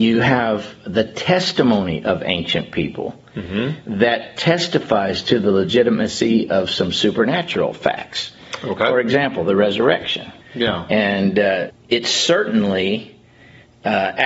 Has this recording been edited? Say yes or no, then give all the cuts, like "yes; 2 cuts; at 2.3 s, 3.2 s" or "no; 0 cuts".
yes; 2 cuts; at 10.4 s, 11.7 s